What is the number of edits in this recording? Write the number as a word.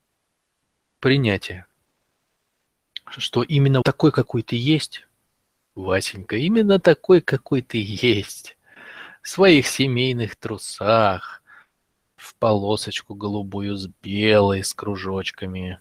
one